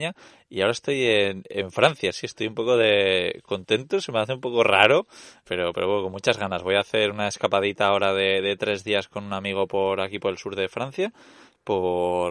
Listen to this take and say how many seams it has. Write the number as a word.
zero